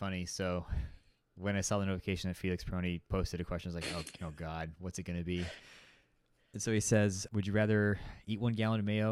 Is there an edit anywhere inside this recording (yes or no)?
yes